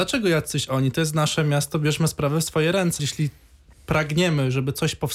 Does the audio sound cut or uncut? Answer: cut